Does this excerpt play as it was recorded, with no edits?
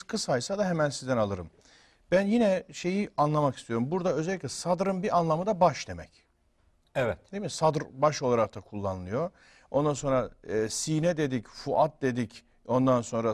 yes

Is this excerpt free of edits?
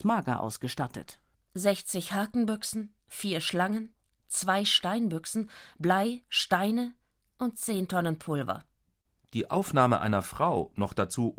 yes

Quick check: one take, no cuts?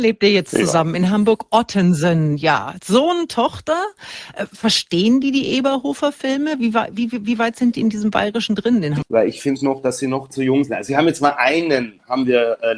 no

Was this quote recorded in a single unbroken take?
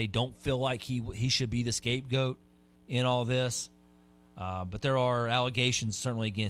yes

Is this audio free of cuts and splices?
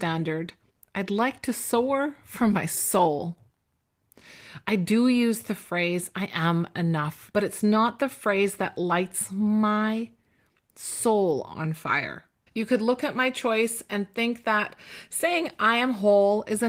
no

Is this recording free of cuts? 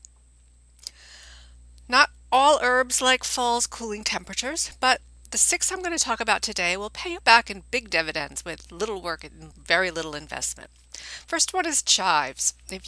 no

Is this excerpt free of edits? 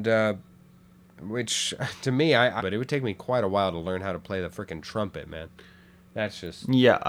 no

